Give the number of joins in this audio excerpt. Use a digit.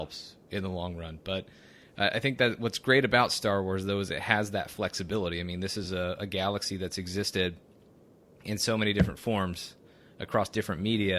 0